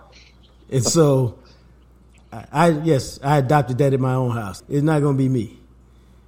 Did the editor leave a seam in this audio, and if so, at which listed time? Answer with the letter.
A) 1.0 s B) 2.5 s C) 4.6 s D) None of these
C